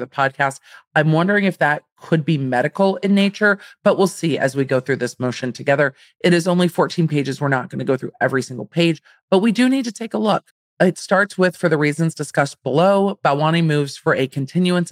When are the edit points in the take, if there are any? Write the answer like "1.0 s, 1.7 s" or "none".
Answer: none